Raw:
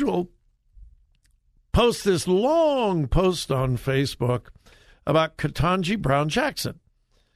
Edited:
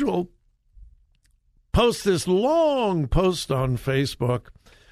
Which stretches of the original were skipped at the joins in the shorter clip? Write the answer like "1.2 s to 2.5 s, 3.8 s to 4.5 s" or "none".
none